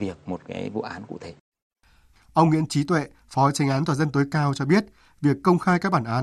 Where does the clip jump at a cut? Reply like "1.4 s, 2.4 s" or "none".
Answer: 2.1 s